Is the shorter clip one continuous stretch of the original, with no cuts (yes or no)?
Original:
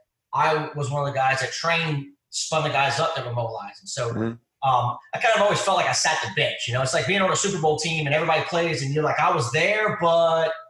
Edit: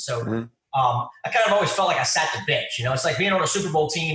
yes